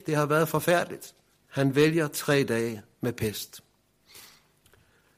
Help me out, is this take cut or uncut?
cut